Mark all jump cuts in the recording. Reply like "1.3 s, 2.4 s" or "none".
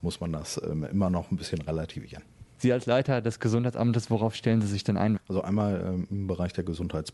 2.6 s, 5.2 s